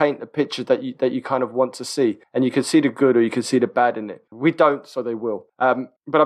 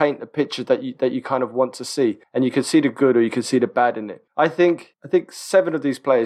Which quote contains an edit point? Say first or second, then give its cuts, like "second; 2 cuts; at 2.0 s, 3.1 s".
first; 1 cut; at 4.3 s